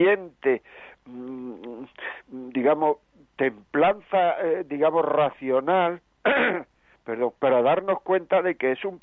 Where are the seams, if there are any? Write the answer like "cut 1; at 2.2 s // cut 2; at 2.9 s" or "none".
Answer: cut 1; at 7.4 s